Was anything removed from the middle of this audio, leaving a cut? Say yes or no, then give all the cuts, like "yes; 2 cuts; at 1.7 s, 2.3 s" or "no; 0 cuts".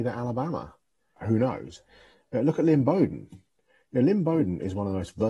yes; 1 cut; at 1.2 s